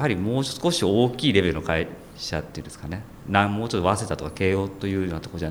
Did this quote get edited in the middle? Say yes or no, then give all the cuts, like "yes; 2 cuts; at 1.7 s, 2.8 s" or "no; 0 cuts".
no; 0 cuts